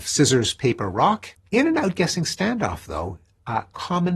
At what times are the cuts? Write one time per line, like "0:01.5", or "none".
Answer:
0:01.4